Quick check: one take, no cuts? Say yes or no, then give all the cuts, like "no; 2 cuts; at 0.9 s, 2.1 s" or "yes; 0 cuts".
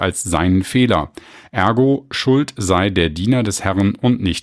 yes; 0 cuts